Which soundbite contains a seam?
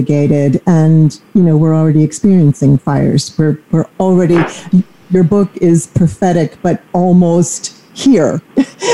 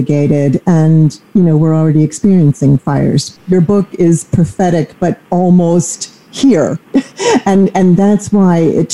second; 1 cut; at 3.4 s

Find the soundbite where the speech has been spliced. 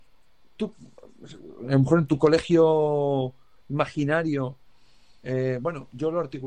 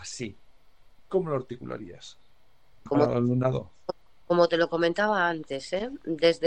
second; 1 cut; at 2.9 s

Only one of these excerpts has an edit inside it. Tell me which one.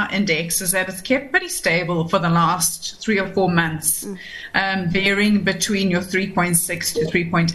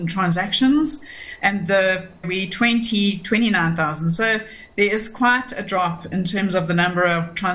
second; 1 cut; at 2.2 s

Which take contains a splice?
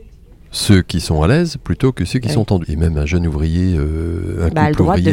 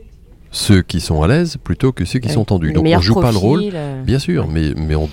first; 1 cut; at 2.6 s

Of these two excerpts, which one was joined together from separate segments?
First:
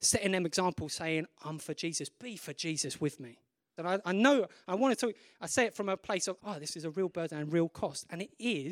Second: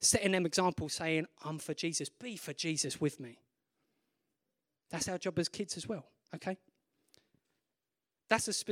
first; 2 cuts; at 3.8 s, 6.4 s

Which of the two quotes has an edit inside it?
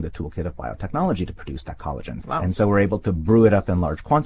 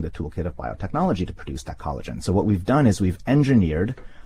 first; 1 cut; at 2.2 s

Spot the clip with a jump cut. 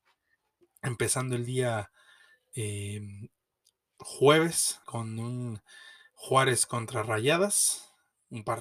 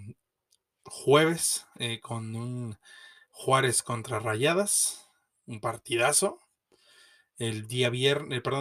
first; 1 cut; at 4.8 s

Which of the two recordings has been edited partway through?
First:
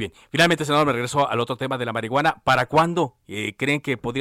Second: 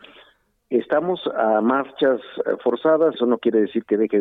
second; 1 cut; at 3.1 s

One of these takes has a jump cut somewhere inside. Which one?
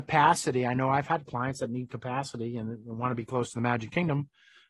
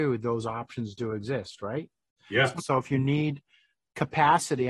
second; 1 cut; at 2.6 s

